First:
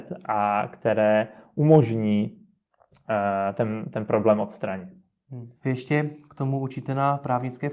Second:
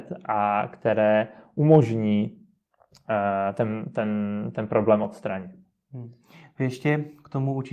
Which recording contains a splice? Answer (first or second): first